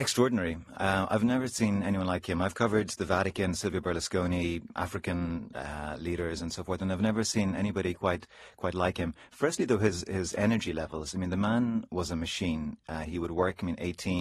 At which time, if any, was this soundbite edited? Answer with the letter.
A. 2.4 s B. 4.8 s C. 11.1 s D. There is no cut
B